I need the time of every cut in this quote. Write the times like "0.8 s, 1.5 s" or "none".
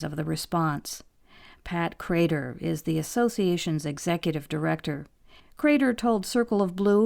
5.4 s

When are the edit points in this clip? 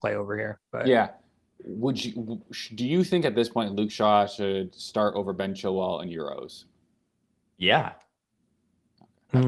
none

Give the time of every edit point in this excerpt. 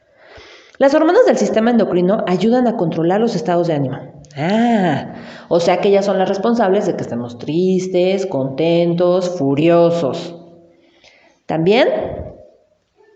none

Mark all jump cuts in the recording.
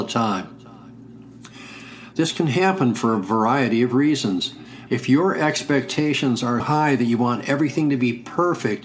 2.1 s, 4.9 s, 6.6 s

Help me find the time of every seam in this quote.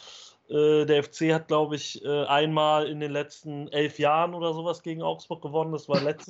none

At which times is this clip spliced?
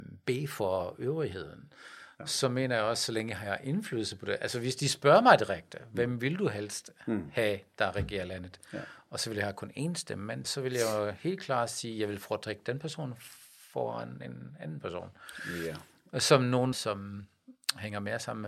10.4 s, 16.7 s

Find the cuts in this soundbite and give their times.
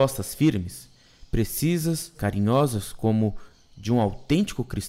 2.1 s

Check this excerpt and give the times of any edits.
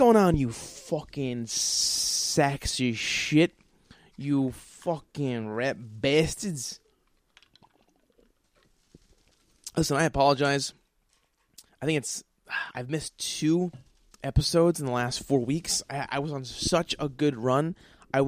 none

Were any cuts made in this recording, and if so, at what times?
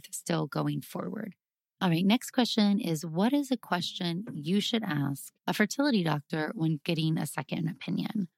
1.6 s, 5.4 s

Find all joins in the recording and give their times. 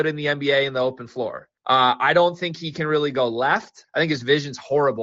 1.6 s, 3.8 s

